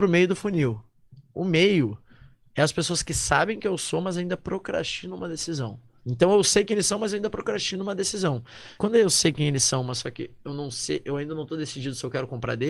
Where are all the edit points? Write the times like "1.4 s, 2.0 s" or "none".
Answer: 6.0 s, 8.8 s